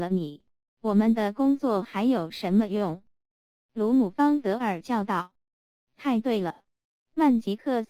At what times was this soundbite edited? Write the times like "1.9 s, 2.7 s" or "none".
3.3 s